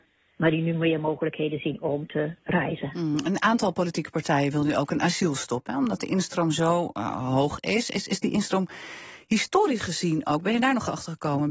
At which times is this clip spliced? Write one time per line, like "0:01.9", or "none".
none